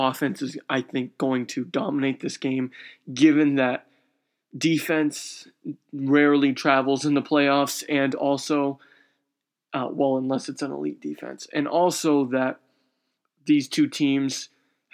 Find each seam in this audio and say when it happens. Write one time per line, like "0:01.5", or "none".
none